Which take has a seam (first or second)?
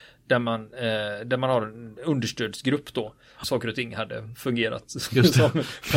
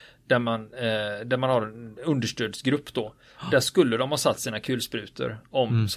first